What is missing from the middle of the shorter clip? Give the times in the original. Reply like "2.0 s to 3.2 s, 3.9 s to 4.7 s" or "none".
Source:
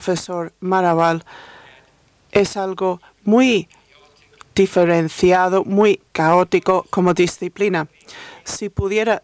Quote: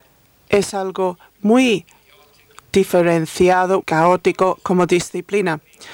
5.6 s to 6.1 s